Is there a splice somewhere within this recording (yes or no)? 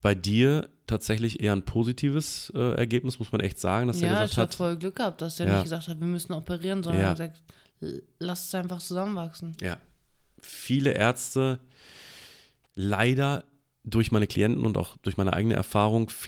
no